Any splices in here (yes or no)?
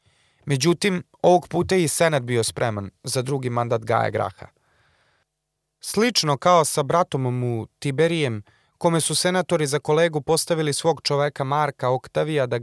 no